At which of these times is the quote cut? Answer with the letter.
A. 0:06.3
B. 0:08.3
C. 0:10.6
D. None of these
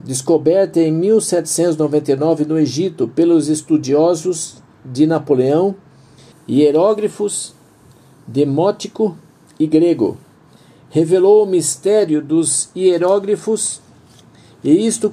A